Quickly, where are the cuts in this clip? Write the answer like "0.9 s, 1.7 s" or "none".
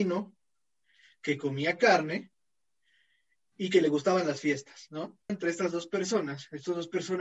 5.3 s